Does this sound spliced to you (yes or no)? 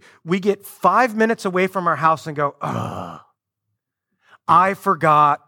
no